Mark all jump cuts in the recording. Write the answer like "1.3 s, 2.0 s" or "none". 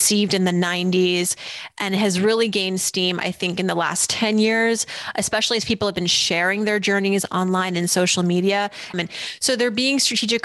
8.9 s